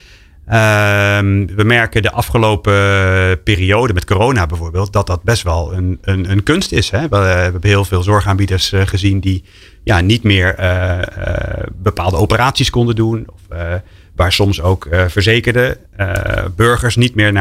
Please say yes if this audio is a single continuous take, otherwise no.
yes